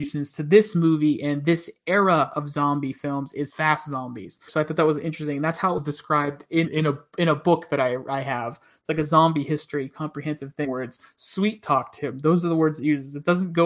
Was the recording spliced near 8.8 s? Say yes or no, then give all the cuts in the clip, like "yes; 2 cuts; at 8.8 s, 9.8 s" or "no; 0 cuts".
no; 1 cut; at 4.5 s